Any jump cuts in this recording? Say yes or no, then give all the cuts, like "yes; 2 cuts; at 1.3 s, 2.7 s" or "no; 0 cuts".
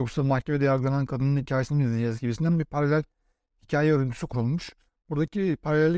no; 0 cuts